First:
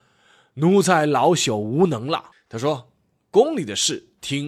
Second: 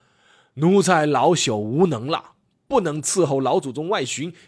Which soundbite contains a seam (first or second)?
first